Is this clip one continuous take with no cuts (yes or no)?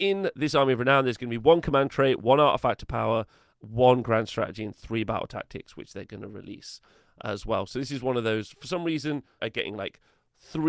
no